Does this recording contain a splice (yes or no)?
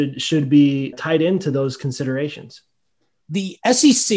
yes